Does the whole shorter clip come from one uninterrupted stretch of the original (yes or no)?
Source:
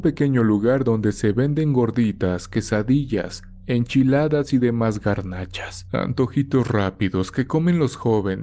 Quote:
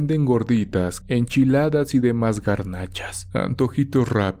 no